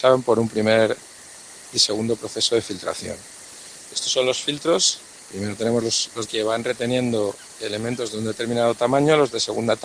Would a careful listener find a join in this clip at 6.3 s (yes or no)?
yes